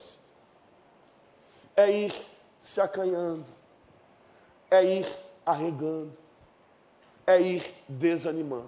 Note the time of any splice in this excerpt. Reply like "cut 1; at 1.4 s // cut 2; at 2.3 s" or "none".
none